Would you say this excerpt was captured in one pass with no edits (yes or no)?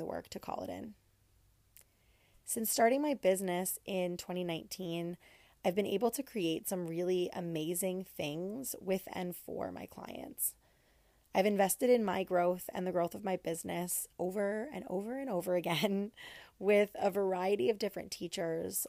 yes